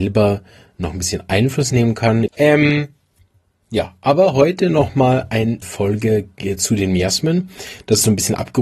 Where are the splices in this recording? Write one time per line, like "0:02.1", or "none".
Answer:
0:02.3
0:05.6